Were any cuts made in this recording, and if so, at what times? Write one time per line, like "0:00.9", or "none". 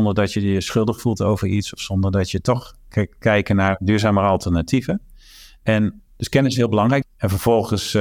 0:06.0
0:07.0